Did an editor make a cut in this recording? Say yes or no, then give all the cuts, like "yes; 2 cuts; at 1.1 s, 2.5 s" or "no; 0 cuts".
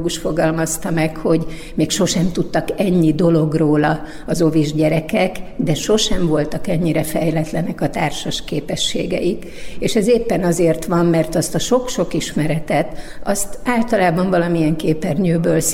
no; 0 cuts